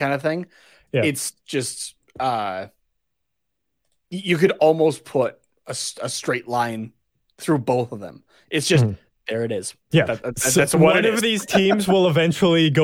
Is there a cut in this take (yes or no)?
yes